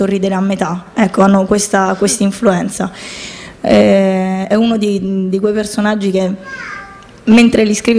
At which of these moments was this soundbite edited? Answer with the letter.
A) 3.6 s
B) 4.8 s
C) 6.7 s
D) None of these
A